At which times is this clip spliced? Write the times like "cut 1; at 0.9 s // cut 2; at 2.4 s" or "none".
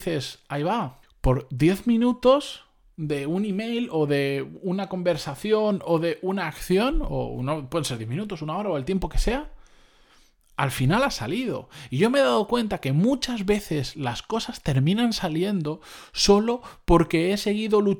cut 1; at 1.0 s